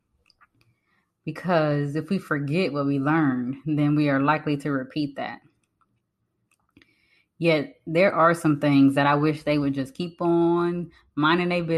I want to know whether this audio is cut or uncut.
uncut